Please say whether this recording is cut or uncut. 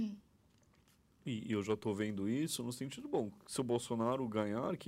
uncut